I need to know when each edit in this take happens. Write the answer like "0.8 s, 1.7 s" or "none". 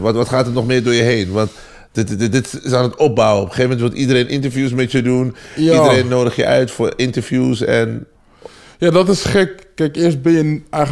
none